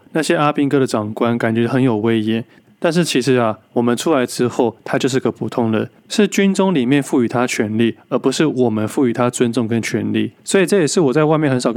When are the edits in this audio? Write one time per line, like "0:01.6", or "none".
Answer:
0:10.4